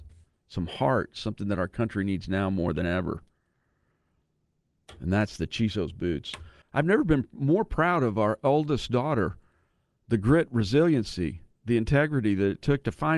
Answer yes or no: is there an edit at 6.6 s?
yes